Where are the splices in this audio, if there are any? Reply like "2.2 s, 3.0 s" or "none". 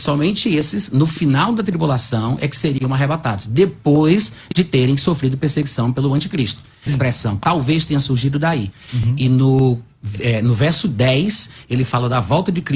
6.9 s, 8.9 s